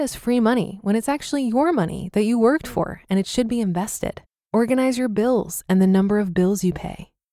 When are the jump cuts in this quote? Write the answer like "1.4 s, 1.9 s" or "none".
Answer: 4.5 s